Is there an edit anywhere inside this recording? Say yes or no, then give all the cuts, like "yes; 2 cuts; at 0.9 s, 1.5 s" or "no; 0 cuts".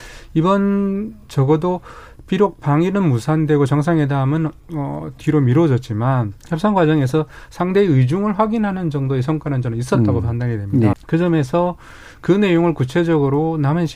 yes; 2 cuts; at 6.4 s, 10.9 s